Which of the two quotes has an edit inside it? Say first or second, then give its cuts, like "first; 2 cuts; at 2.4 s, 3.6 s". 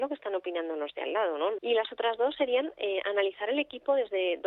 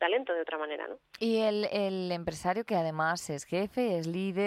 first; 1 cut; at 1.6 s